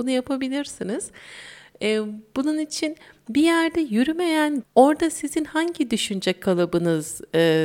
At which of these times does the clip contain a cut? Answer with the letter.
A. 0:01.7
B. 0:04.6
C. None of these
B